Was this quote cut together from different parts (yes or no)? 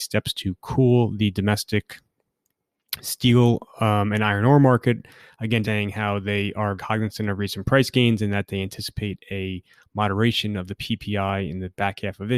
yes